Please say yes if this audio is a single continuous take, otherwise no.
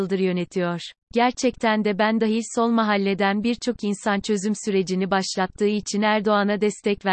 no